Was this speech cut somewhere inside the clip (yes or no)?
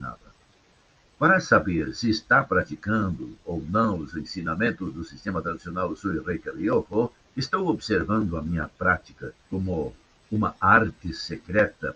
yes